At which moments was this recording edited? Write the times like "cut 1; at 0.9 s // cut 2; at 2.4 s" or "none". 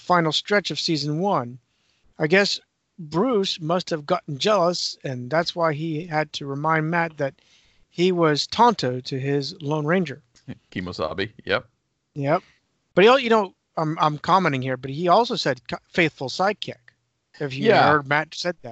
cut 1; at 2.1 s

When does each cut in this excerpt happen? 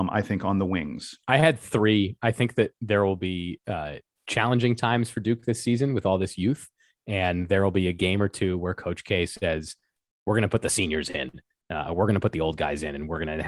cut 1; at 1.2 s

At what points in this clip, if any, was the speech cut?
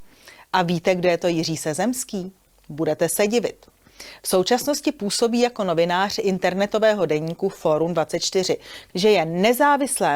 cut 1; at 8.9 s

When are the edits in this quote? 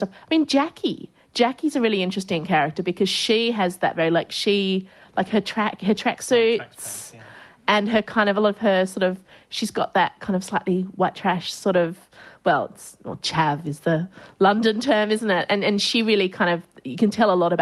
none

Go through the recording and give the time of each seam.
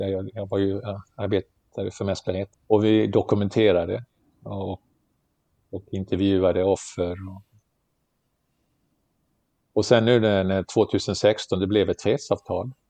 cut 1; at 2.5 s

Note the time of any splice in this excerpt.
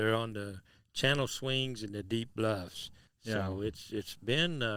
cut 1; at 3.1 s

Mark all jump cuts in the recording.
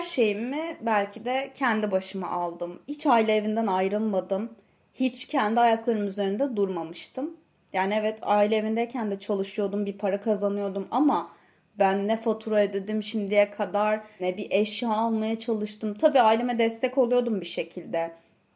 cut 1; at 2.8 s // cut 2; at 14.2 s

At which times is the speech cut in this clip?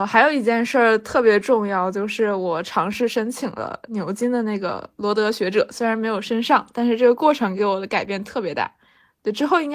none

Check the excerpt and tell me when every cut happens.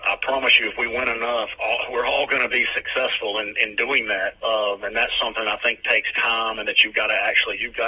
cut 1; at 4.3 s

